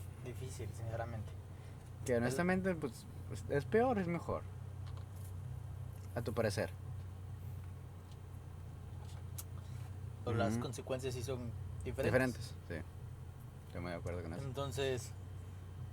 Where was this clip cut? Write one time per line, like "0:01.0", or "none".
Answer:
0:02.0
0:10.3